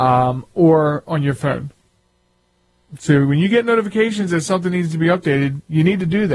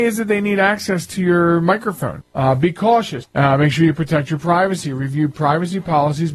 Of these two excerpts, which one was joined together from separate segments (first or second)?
second